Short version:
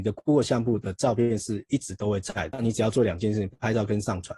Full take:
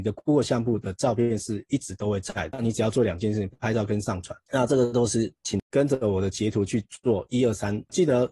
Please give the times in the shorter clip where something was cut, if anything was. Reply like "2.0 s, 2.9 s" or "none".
none